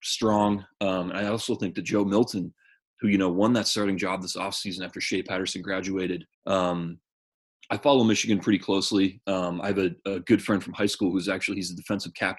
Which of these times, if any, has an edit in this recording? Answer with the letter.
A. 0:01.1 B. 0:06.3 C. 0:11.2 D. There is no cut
B